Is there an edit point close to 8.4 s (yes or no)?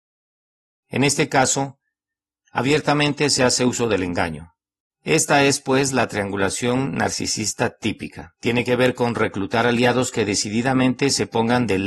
yes